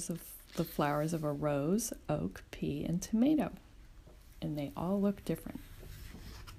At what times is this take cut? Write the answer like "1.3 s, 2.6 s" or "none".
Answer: none